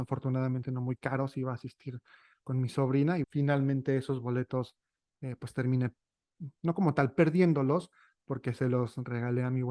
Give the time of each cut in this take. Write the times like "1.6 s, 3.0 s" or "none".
3.2 s